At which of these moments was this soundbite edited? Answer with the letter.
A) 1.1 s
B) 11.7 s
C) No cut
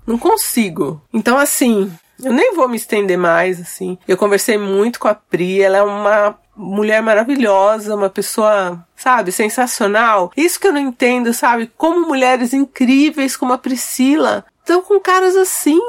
A